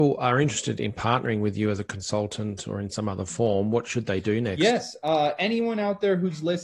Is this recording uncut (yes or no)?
yes